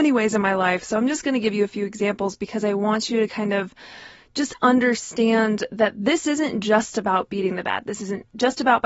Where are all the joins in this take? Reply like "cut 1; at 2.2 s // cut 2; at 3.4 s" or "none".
none